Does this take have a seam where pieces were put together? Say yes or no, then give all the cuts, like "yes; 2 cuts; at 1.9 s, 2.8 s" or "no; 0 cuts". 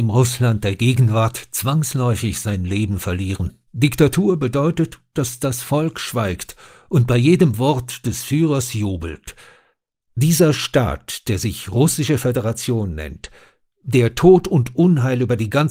yes; 2 cuts; at 3.7 s, 10.0 s